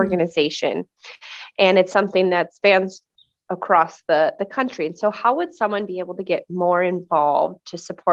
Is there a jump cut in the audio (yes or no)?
no